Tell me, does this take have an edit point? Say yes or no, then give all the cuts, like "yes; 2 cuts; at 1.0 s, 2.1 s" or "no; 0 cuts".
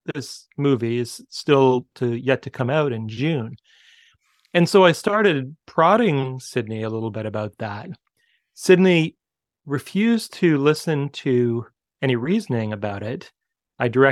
no; 0 cuts